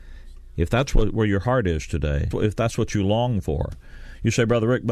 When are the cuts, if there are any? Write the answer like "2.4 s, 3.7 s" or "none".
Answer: 2.3 s